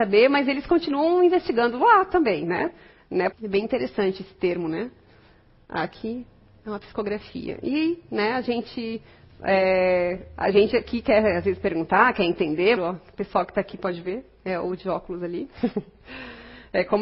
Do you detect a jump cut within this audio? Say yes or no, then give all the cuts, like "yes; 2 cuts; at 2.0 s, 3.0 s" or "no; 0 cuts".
yes; 2 cuts; at 3.3 s, 12.8 s